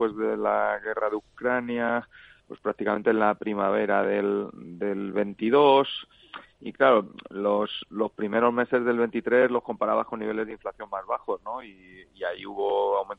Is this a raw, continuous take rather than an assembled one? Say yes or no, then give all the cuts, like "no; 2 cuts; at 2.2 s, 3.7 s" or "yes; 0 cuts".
yes; 0 cuts